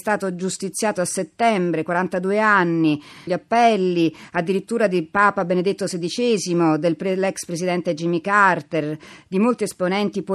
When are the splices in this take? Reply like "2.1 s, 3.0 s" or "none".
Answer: 3.3 s